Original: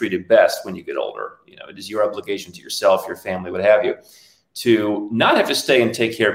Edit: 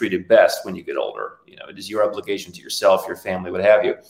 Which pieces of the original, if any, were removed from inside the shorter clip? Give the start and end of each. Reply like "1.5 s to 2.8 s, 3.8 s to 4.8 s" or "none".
none